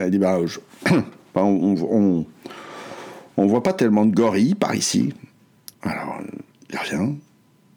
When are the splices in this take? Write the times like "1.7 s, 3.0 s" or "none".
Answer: 5.7 s